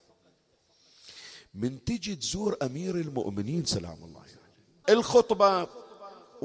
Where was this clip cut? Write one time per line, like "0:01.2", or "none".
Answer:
0:04.8